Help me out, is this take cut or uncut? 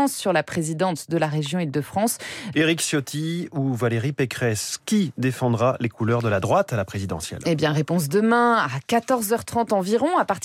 cut